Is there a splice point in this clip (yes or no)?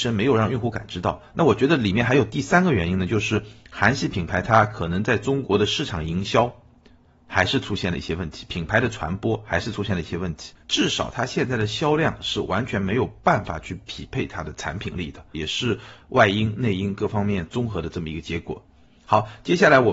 yes